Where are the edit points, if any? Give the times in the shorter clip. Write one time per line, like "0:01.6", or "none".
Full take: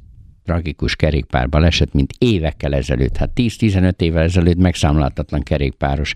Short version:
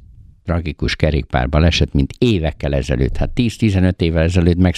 none